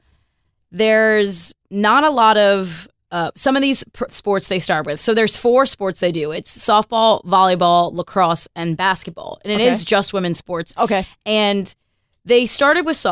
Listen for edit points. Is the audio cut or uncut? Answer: cut